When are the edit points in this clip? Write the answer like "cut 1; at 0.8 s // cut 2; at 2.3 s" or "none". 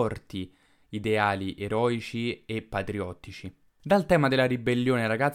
cut 1; at 3.7 s